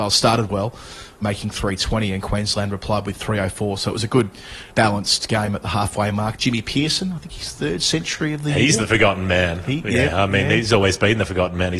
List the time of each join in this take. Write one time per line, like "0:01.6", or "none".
none